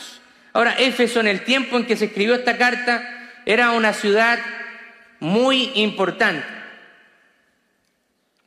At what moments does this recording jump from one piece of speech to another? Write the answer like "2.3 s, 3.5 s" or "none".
none